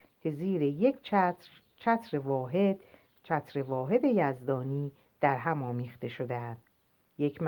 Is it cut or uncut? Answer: uncut